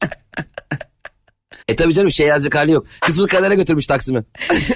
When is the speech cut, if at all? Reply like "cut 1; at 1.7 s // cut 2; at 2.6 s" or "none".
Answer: cut 1; at 1.6 s // cut 2; at 3.0 s